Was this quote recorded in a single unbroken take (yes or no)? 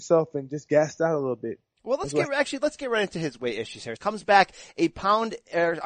no